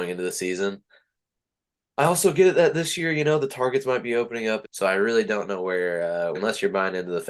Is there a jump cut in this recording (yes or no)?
yes